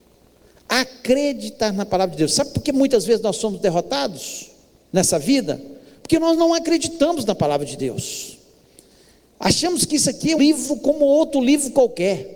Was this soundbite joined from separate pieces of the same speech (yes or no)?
yes